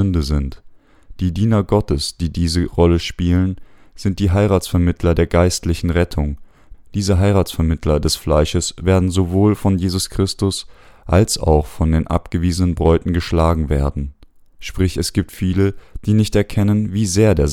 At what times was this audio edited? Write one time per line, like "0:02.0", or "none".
0:06.7
0:14.5